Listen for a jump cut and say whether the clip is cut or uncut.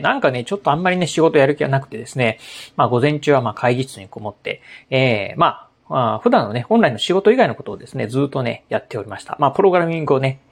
uncut